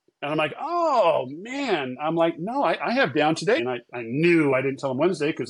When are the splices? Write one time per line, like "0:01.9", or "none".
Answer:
0:03.6